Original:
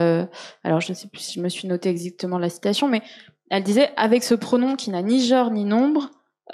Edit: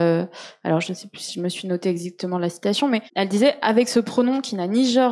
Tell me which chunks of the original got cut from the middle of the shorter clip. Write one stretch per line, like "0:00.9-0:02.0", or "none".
0:03.1-0:03.4